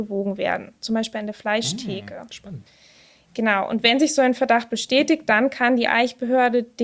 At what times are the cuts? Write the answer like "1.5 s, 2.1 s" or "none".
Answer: none